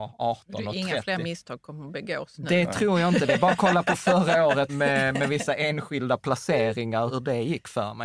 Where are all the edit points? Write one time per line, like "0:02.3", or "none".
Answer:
0:04.7
0:07.1

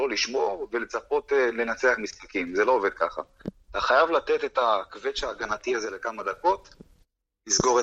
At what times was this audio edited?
none

